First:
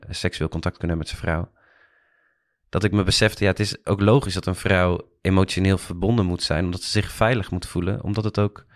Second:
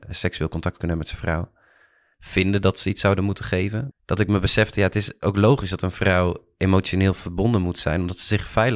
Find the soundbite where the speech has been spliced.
second; 2 cuts; at 2.1 s, 3.9 s

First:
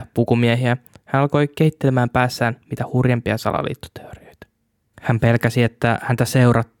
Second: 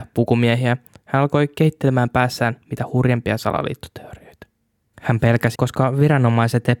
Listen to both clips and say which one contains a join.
second; 1 cut; at 5.5 s

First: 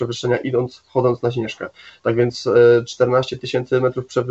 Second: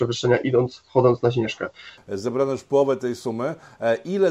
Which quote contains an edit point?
second; 1 cut; at 2.0 s

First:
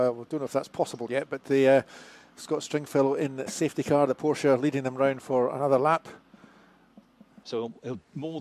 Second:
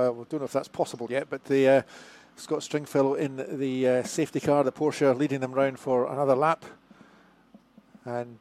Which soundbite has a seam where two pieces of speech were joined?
first; 2 cuts; at 3.5 s, 7.4 s

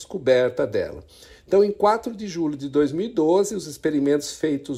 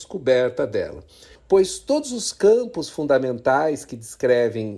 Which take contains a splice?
second; 1 cut; at 1.4 s

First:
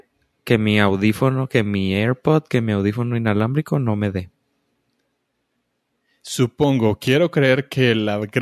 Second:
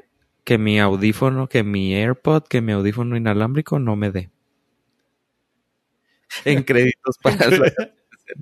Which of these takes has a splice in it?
second; 1 cut; at 6.2 s

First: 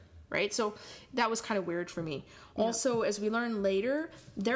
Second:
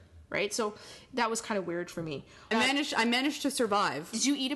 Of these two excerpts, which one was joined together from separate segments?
second; 1 cut; at 2.5 s

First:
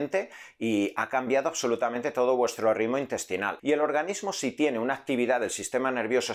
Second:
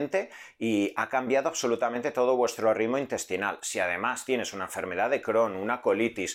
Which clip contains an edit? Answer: first; 1 cut; at 3.6 s

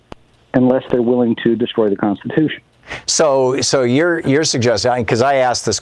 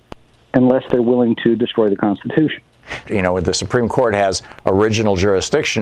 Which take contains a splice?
second; 1 cut; at 3.1 s

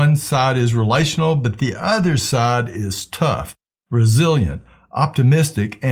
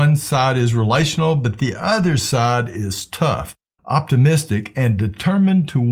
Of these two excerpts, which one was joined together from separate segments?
second; 1 cut; at 3.8 s

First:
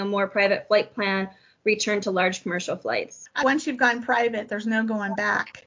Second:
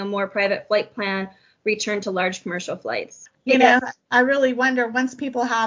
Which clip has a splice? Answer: second; 1 cut; at 3.3 s

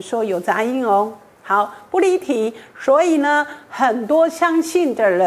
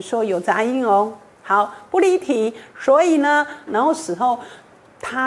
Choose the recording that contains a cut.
second; 1 cut; at 3.7 s

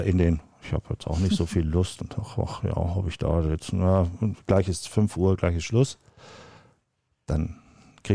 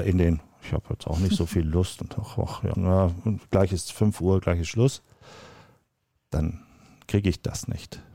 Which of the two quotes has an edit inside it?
second; 1 cut; at 2.7 s

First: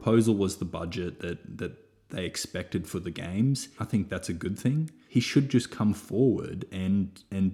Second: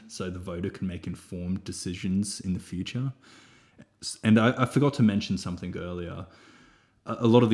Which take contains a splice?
first; 2 cuts; at 3.8 s, 5.1 s

